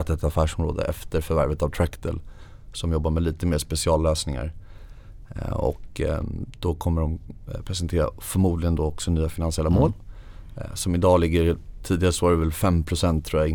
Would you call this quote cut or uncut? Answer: uncut